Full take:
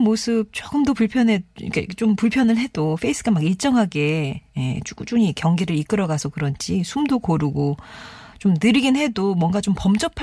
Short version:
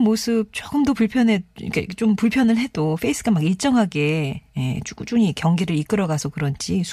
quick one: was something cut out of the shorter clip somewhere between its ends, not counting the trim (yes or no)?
no